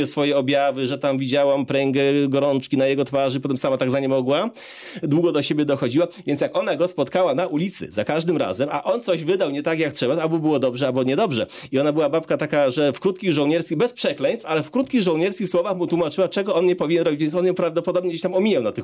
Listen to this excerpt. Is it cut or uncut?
uncut